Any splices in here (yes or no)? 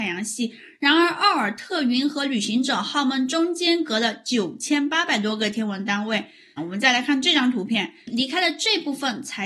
yes